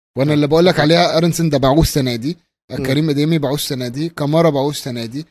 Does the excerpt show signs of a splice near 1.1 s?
yes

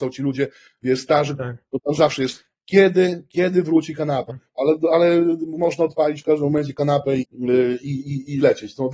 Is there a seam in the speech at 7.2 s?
yes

